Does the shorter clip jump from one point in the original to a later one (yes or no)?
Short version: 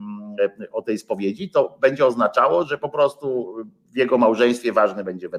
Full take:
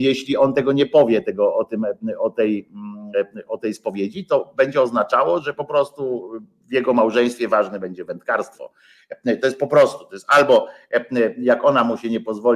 no